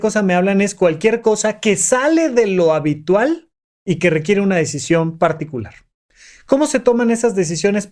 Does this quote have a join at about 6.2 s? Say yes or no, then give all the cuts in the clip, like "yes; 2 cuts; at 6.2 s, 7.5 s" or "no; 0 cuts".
no; 0 cuts